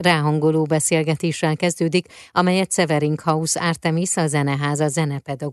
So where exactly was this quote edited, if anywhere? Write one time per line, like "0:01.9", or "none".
none